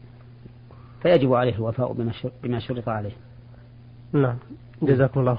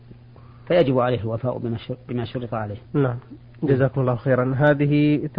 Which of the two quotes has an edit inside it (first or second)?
second